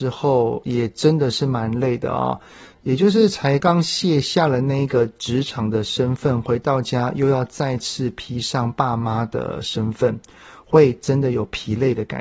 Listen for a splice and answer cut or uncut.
cut